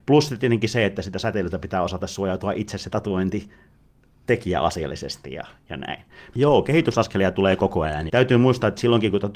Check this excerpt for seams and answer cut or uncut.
cut